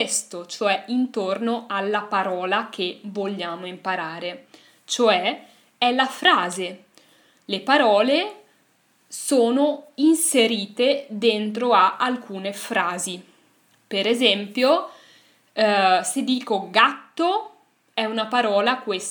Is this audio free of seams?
yes; 0 cuts

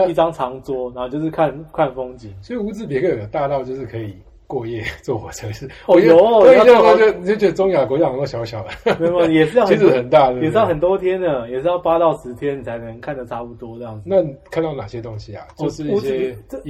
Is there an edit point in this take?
no; 0 cuts

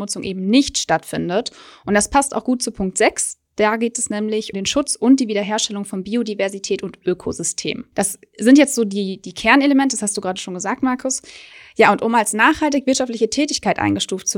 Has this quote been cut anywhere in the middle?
yes; 1 cut; at 4.5 s

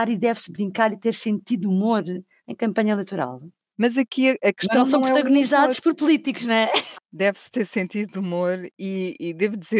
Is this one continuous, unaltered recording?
no; 2 cuts; at 3.7 s, 6.9 s

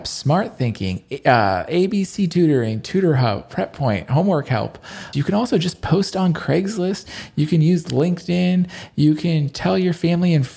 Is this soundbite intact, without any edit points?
no; 1 cut; at 5.1 s

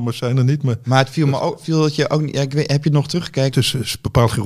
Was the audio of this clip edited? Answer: yes; 1 cut; at 3.5 s

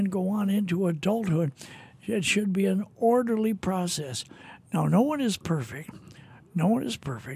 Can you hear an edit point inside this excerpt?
no; 0 cuts

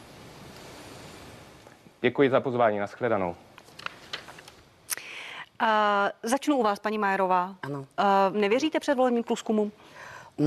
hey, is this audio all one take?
no; 1 cut; at 8.3 s

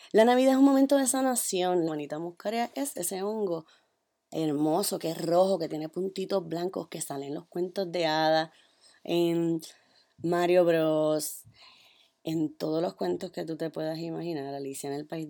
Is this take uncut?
no; 1 cut; at 1.9 s

